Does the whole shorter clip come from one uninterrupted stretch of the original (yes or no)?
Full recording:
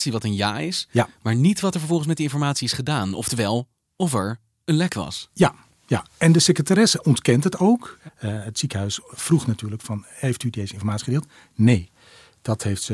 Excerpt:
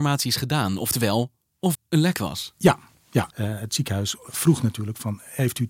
no